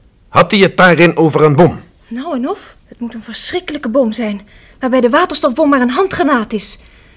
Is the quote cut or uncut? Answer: cut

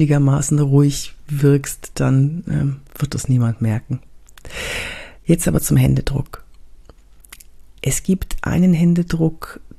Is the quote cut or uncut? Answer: cut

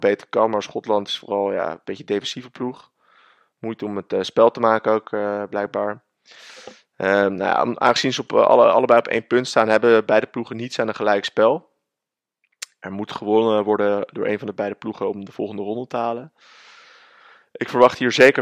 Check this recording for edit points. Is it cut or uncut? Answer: uncut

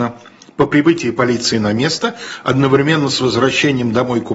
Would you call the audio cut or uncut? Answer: uncut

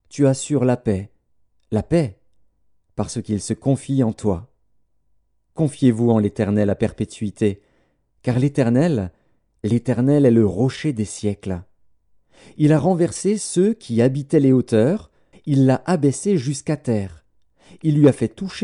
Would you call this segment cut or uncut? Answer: cut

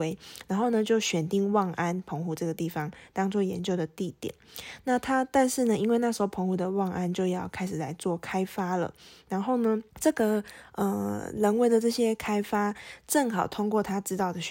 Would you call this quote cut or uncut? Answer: cut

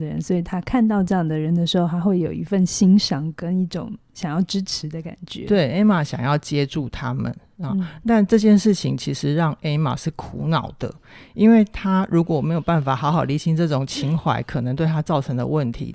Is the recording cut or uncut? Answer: uncut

